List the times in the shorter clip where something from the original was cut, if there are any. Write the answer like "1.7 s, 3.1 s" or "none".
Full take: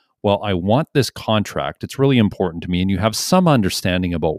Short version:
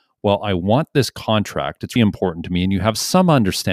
2.0 s